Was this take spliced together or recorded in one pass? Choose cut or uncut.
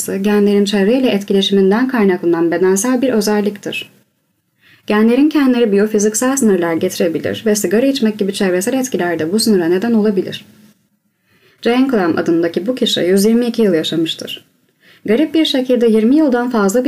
cut